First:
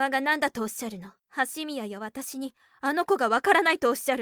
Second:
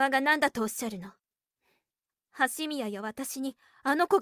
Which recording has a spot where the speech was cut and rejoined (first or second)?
first